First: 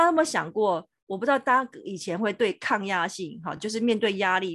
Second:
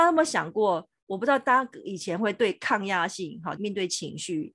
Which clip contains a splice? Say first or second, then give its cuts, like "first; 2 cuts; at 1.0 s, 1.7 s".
second; 1 cut; at 3.6 s